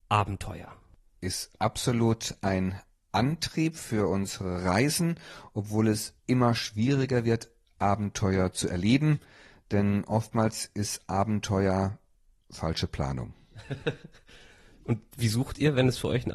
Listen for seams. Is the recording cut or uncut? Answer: uncut